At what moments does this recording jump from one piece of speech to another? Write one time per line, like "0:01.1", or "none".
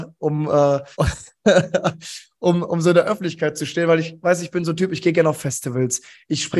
0:00.9